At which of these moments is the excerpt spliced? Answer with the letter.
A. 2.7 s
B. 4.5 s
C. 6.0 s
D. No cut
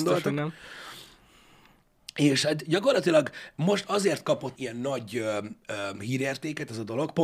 B